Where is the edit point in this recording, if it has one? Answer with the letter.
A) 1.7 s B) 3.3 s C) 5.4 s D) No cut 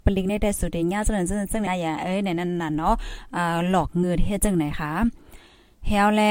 A